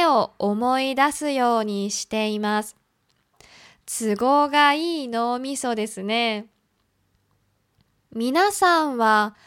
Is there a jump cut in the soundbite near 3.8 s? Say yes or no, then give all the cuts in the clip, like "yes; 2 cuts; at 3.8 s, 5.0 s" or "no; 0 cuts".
no; 0 cuts